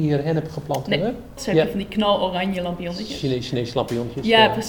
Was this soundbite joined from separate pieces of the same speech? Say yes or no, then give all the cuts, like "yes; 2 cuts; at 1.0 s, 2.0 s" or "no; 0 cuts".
yes; 1 cut; at 1.4 s